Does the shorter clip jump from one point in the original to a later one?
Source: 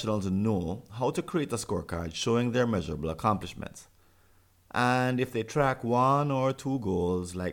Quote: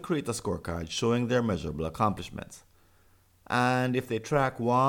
no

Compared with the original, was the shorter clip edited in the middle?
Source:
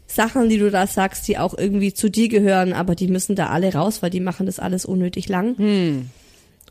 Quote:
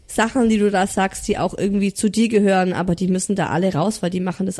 no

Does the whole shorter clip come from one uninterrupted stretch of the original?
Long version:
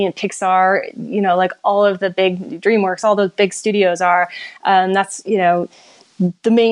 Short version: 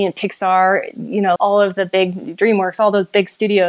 no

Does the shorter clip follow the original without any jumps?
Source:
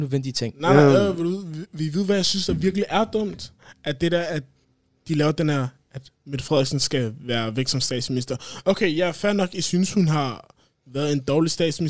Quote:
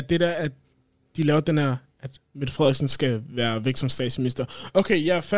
yes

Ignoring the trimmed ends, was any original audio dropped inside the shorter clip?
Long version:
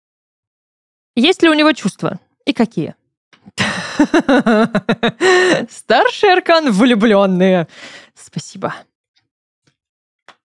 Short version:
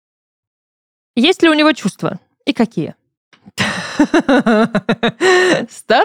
no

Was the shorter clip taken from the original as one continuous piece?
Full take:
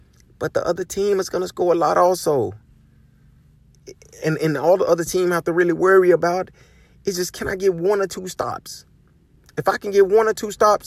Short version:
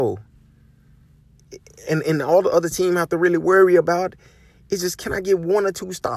yes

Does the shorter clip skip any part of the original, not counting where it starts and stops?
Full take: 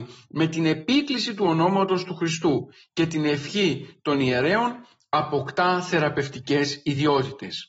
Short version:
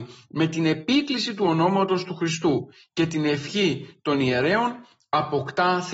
no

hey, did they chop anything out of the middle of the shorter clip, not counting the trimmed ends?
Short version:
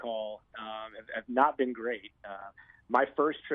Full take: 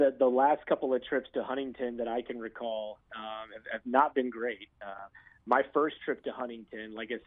no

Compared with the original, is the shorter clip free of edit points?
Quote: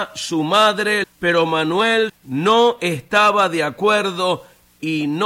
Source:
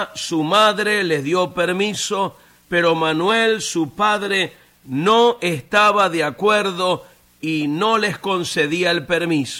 no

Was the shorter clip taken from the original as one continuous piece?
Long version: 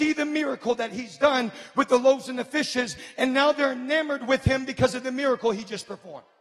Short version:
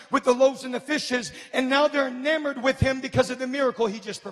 yes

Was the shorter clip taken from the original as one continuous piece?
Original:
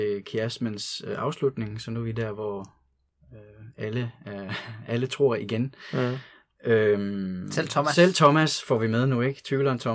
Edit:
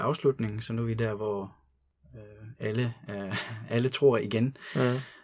yes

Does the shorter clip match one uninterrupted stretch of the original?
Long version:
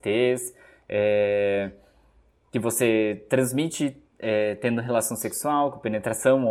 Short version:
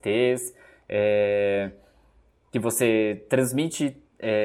yes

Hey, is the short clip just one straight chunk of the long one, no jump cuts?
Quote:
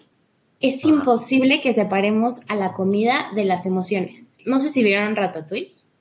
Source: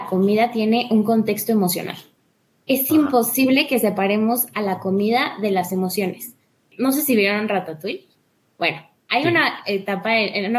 no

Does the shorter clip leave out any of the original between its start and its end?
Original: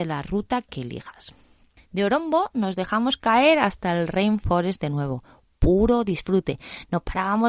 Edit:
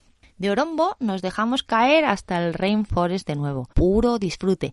yes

